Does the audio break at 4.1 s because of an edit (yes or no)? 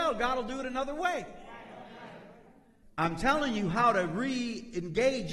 no